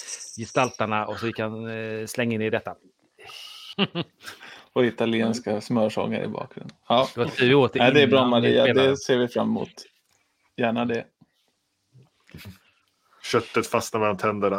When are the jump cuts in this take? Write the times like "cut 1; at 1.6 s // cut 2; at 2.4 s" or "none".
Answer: cut 1; at 3.7 s // cut 2; at 13.2 s